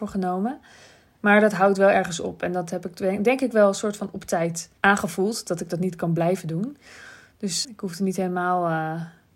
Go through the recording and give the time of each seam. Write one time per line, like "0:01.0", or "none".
0:01.1
0:04.8
0:07.6